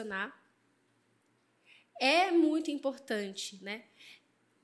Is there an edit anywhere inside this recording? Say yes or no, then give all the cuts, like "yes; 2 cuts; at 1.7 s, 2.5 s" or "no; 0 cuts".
no; 0 cuts